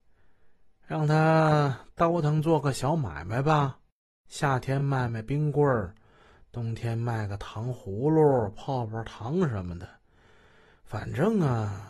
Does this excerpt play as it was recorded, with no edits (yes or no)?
yes